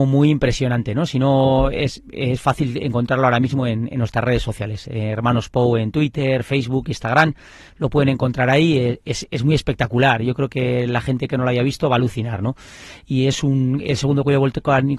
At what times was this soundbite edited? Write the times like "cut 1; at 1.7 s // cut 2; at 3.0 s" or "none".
none